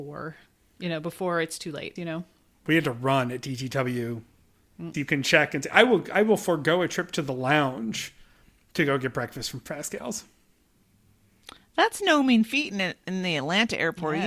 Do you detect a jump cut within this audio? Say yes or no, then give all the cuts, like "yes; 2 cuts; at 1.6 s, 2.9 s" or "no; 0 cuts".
yes; 2 cuts; at 2.0 s, 4.9 s